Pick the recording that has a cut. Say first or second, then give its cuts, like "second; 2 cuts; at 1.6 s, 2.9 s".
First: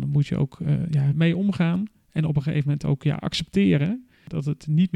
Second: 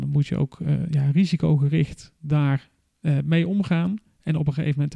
first; 1 cut; at 1.1 s